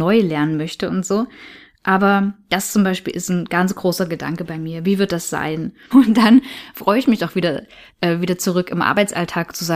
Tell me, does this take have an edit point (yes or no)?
yes